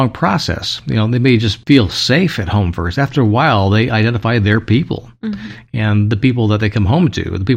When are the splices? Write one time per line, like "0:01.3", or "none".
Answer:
none